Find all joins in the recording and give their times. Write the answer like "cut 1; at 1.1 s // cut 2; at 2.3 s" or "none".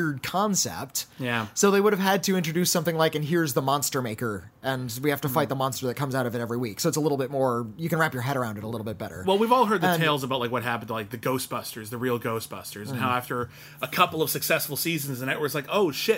none